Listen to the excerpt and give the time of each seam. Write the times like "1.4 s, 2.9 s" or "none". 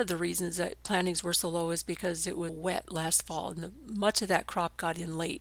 2.5 s